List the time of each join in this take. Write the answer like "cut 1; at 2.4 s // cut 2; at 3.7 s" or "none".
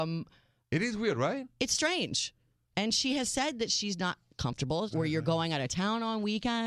cut 1; at 4.9 s